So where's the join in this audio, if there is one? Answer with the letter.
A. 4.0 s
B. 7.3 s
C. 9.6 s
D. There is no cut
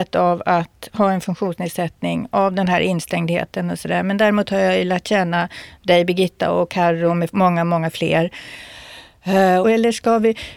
C